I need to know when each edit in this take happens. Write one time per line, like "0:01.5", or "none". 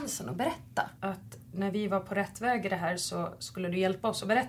0:01.0